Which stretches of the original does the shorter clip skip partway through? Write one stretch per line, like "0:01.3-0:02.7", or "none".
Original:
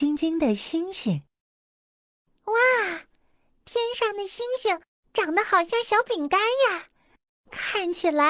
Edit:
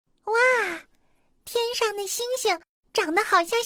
none